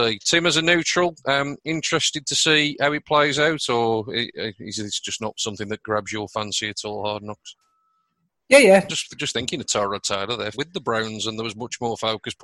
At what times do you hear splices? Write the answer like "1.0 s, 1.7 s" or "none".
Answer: 8.9 s, 10.5 s